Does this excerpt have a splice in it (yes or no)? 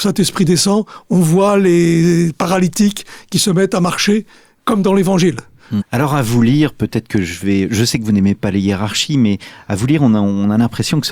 yes